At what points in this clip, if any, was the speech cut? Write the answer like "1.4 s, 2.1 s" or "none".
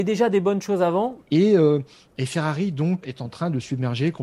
1.2 s, 3.0 s